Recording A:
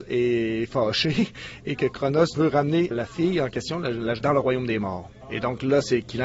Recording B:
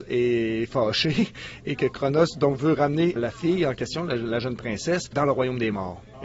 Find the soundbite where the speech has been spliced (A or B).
A